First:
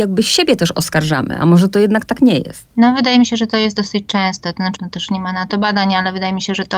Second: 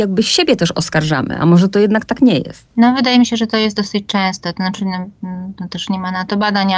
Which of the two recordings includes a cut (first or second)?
first